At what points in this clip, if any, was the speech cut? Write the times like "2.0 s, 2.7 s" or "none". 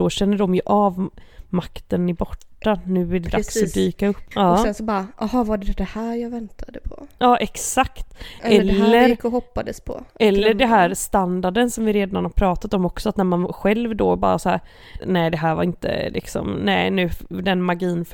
4.3 s, 15.0 s